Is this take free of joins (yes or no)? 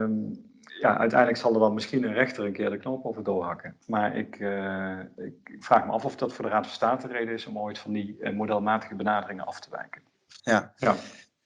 no